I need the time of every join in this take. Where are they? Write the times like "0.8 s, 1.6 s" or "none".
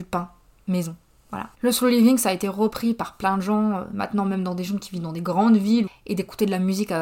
1.5 s, 5.9 s